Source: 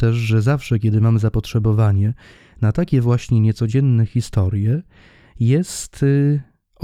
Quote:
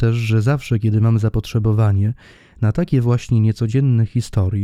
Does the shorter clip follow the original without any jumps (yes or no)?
yes